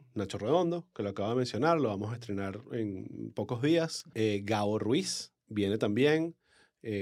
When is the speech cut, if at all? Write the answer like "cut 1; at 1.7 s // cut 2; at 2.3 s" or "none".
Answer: cut 1; at 4.1 s